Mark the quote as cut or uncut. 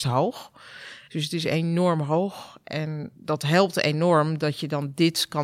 cut